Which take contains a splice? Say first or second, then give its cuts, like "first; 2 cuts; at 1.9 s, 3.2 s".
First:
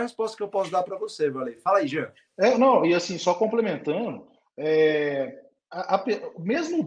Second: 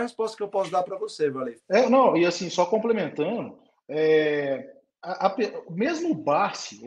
second; 1 cut; at 1.6 s